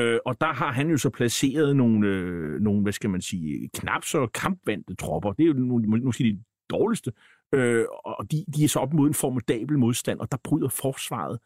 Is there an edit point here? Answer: no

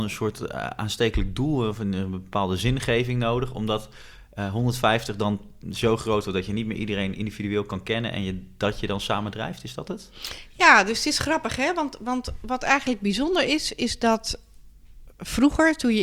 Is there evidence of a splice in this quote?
no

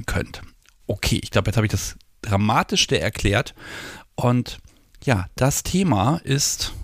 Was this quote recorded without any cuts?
yes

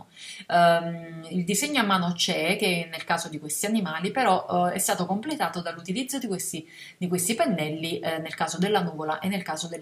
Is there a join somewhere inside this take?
no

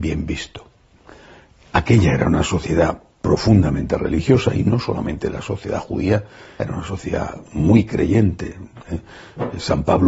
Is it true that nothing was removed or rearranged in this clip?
no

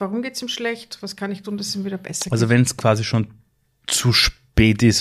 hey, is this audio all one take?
yes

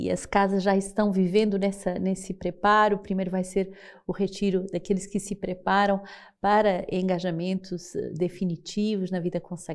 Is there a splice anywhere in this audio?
no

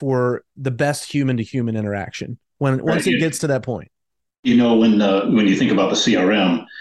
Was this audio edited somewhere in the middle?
no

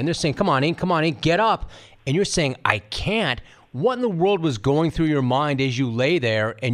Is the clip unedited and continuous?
yes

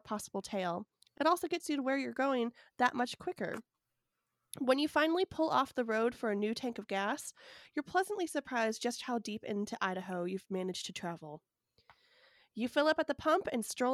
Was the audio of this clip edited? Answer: no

